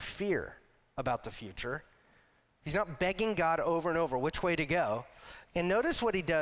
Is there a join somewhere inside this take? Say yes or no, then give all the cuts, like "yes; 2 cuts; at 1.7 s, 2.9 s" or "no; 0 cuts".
yes; 1 cut; at 5.5 s